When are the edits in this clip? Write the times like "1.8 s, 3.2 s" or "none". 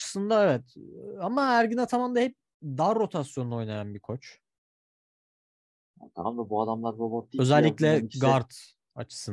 none